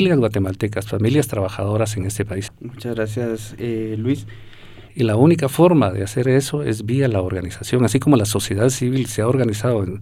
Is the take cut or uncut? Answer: cut